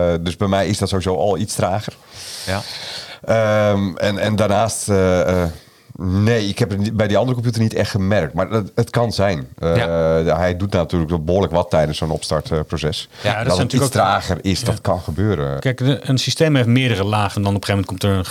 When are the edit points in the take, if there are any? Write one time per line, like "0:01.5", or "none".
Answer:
0:15.6
0:17.3